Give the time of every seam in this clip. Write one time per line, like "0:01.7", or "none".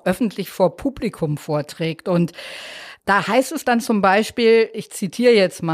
0:03.0